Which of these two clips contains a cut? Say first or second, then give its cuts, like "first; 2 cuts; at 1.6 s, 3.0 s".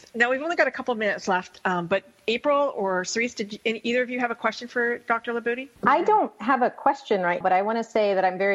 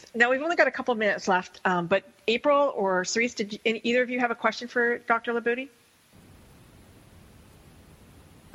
first; 2 cuts; at 5.8 s, 7.4 s